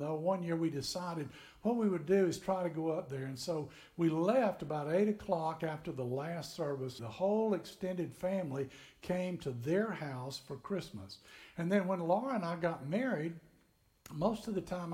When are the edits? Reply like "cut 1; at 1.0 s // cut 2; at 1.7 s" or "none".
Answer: cut 1; at 7.0 s